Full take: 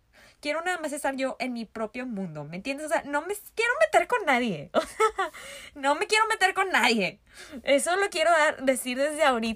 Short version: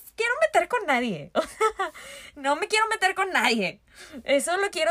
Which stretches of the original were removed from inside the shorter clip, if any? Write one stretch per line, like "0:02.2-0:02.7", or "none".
none